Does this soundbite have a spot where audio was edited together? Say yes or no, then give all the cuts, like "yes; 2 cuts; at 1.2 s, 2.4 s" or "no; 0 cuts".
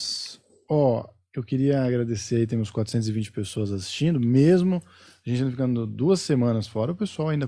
no; 0 cuts